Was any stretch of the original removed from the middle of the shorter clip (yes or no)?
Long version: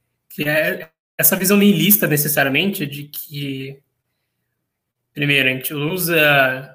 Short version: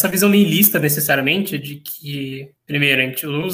yes